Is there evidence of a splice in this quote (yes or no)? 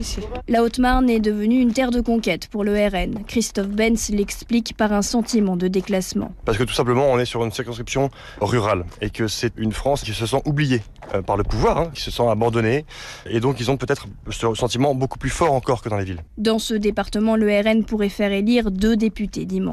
yes